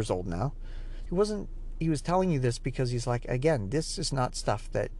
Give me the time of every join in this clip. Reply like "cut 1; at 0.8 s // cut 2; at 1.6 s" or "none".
cut 1; at 1.1 s